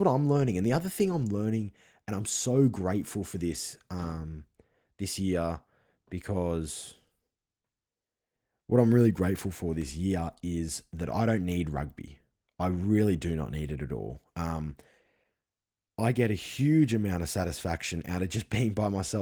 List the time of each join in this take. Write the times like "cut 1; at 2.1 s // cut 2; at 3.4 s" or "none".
none